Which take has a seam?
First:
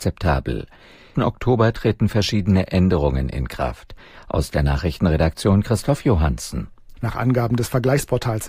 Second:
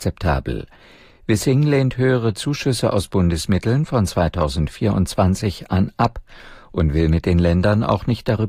first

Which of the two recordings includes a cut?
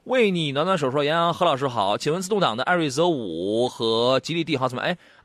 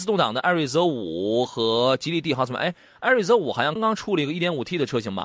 second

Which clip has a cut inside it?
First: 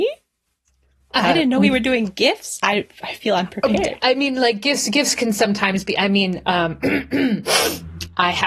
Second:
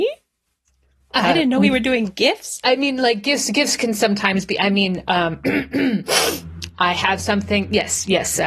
second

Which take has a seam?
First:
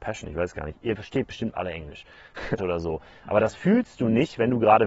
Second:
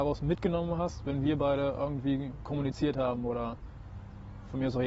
first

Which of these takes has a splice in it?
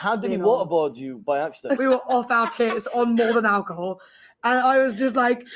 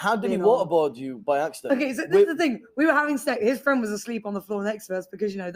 first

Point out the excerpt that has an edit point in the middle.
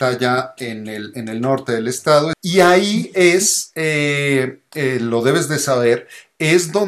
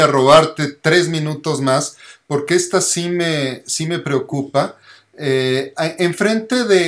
first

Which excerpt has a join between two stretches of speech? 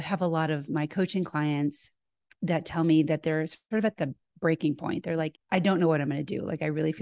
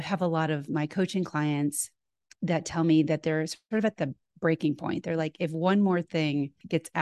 first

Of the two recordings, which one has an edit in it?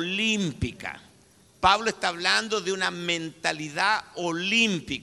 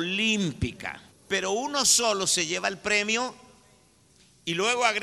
second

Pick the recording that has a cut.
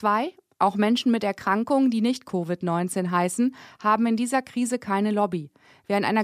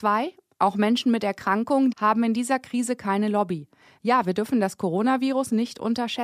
second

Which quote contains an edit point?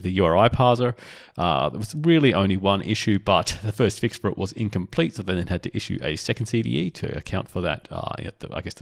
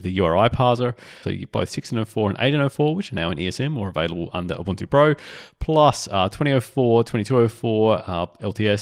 second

